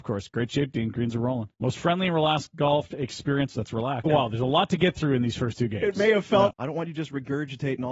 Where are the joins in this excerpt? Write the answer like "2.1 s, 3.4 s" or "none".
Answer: 1.5 s, 4.1 s, 6.5 s